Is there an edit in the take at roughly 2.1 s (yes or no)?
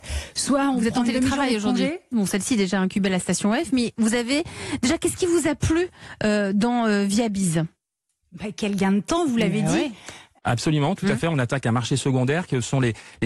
yes